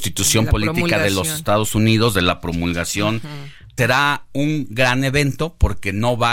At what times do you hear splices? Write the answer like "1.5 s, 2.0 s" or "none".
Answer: 3.8 s